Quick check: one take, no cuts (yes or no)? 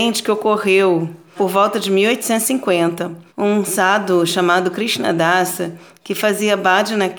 no